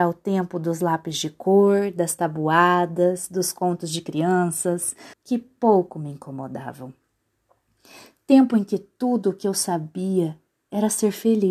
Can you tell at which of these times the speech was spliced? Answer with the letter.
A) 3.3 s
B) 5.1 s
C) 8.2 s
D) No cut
B